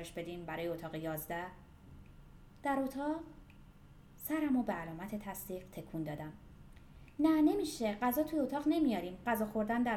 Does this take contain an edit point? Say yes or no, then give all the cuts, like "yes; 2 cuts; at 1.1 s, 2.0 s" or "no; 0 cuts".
no; 0 cuts